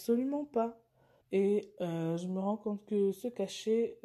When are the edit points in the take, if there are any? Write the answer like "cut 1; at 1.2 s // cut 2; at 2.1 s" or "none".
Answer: cut 1; at 1.2 s